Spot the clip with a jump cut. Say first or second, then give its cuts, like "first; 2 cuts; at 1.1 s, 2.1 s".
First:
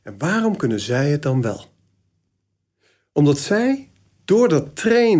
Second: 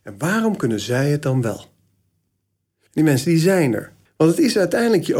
second; 2 cuts; at 2.9 s, 4.1 s